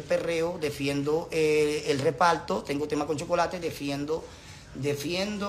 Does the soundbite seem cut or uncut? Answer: uncut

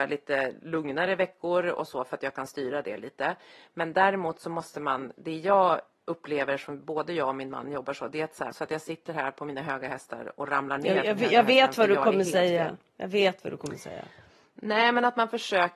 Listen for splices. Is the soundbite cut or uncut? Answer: cut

